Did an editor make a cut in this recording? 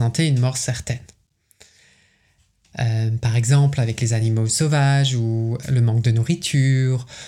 yes; 2 cuts; at 2.7 s, 5.6 s

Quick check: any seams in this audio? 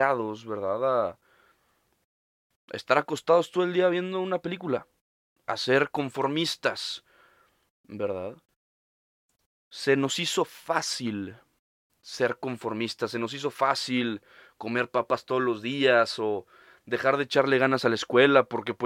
no; 0 cuts

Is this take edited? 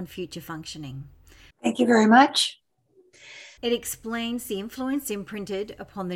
yes; 2 cuts; at 1.5 s, 3.6 s

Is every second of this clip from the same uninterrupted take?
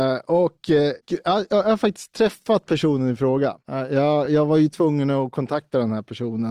yes; 0 cuts

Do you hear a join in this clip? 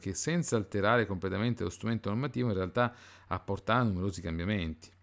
no; 0 cuts

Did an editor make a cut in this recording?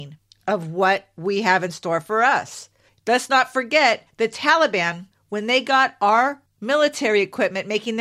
no; 0 cuts

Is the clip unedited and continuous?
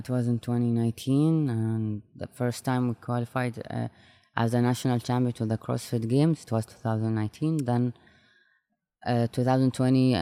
yes; 0 cuts

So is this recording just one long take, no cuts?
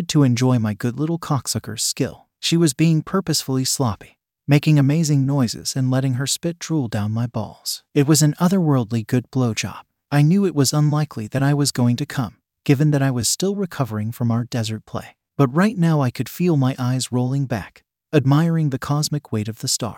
yes; 0 cuts

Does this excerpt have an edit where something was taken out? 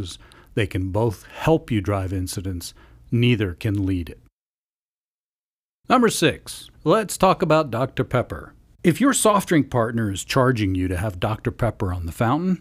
yes; 1 cut; at 6.7 s

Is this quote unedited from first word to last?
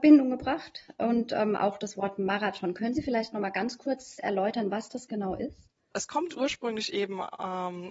no; 1 cut; at 5.9 s

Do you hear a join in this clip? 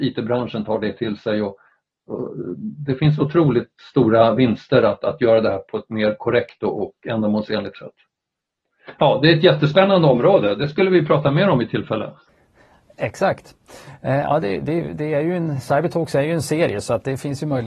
no; 0 cuts

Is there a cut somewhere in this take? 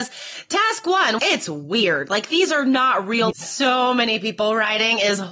yes; 2 cuts; at 1.2 s, 3.3 s

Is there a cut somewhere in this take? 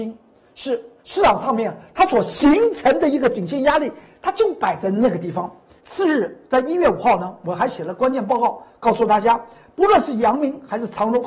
yes; 1 cut; at 5.8 s

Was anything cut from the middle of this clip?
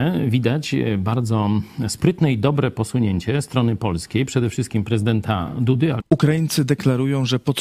yes; 1 cut; at 6.0 s

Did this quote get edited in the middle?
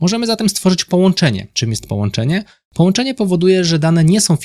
no; 0 cuts

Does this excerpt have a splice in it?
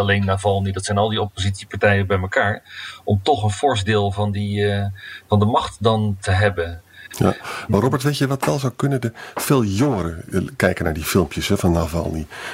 no; 0 cuts

